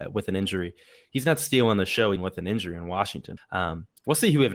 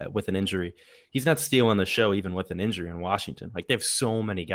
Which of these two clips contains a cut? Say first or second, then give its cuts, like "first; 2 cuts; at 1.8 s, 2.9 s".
first; 2 cuts; at 2.2 s, 3.4 s